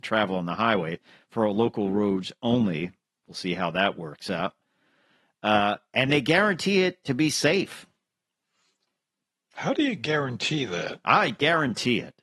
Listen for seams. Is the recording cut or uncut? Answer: uncut